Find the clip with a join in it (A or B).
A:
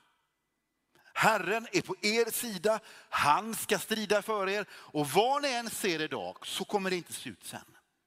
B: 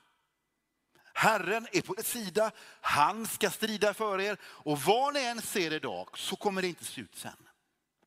B